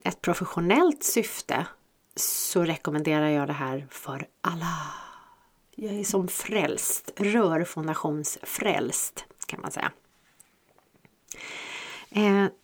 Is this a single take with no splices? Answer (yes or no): yes